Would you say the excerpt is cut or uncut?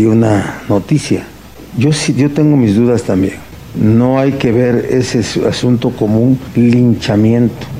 uncut